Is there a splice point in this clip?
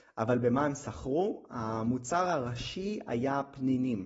no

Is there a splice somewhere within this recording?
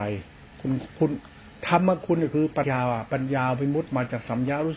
yes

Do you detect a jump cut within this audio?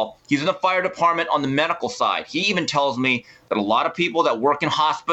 no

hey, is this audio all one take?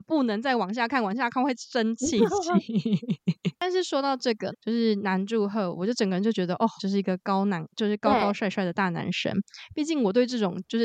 no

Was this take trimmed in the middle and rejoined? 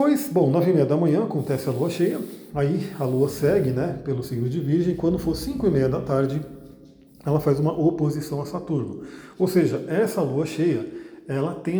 no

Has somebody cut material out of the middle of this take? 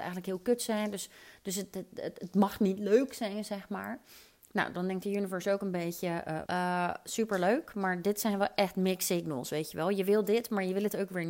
yes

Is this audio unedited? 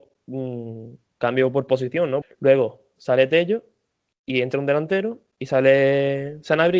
no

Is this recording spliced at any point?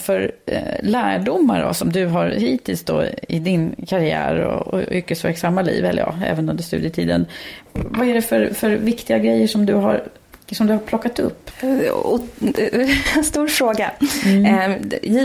no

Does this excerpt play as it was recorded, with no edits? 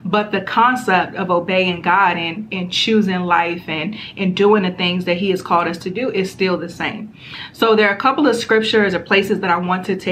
yes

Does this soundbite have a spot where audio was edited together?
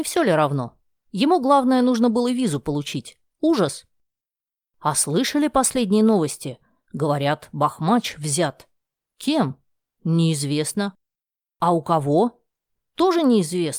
yes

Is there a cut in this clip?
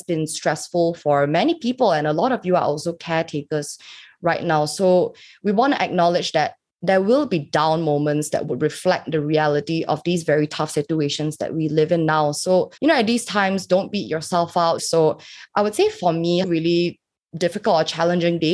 yes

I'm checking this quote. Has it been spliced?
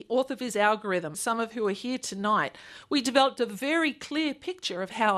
yes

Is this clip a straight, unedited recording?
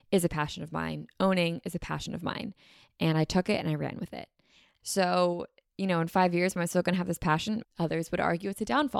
no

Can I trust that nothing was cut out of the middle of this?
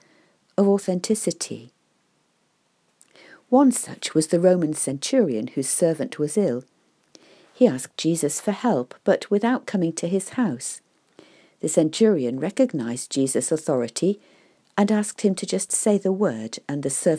yes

